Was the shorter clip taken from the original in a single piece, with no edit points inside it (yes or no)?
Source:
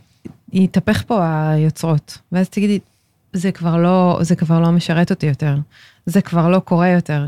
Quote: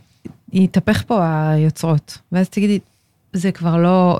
yes